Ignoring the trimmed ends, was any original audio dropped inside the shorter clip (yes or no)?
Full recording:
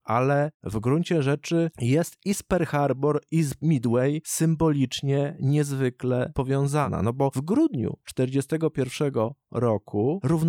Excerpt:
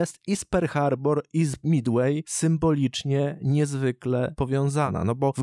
no